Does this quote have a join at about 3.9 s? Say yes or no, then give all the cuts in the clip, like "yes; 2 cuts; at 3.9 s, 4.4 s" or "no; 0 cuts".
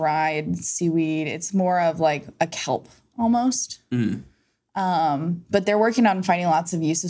no; 0 cuts